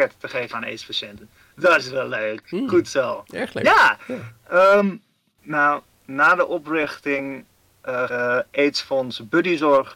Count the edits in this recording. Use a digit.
1